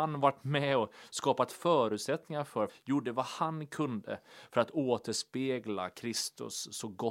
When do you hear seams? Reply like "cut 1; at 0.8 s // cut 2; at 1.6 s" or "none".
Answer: cut 1; at 2.7 s